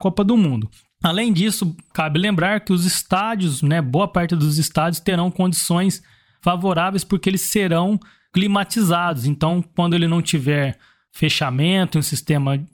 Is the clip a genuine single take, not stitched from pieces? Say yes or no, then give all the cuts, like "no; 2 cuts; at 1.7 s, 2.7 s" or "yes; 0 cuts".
yes; 0 cuts